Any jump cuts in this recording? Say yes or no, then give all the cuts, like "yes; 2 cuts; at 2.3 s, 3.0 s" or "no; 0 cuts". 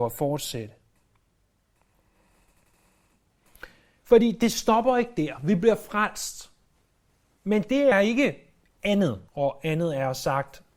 yes; 2 cuts; at 7.9 s, 9.3 s